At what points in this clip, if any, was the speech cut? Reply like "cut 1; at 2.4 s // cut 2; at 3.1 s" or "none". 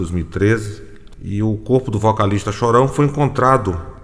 cut 1; at 1.1 s